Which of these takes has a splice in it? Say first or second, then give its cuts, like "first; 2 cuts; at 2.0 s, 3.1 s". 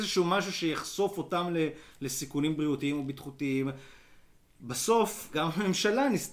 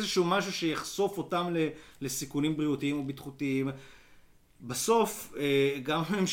first; 1 cut; at 5.3 s